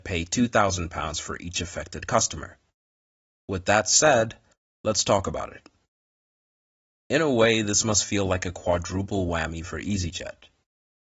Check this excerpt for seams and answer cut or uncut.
uncut